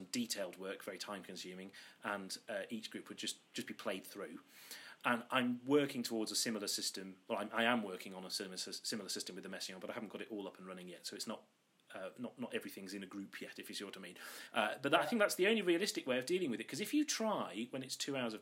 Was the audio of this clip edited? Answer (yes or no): no